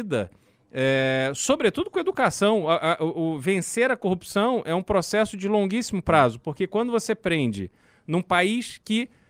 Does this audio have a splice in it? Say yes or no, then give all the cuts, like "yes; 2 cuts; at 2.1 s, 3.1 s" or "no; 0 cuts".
no; 0 cuts